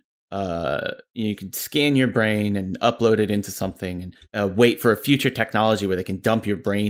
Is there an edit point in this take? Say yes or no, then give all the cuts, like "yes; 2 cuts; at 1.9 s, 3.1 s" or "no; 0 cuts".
yes; 1 cut; at 4.2 s